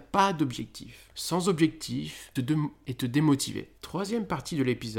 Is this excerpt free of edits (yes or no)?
no